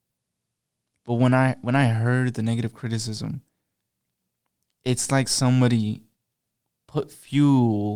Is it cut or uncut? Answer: uncut